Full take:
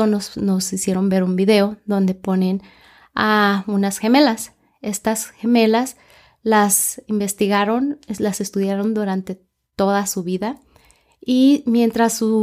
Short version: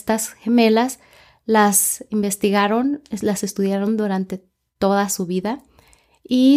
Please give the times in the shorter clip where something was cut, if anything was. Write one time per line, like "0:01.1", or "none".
none